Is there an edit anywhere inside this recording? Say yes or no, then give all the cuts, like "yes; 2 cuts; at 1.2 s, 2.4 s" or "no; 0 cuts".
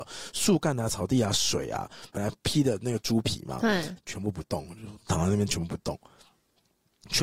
yes; 2 cuts; at 2.1 s, 4.0 s